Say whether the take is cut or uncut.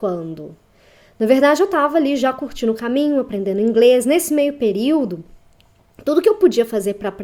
uncut